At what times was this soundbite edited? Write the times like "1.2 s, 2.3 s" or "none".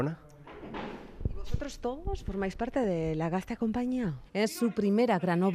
4.3 s